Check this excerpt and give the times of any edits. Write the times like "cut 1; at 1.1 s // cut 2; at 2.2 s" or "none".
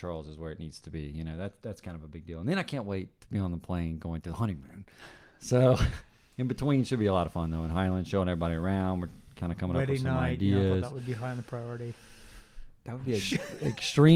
none